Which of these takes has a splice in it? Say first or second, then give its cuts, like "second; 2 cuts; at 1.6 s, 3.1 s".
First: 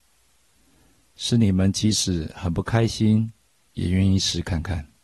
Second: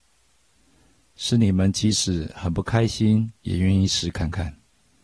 second; 1 cut; at 3.3 s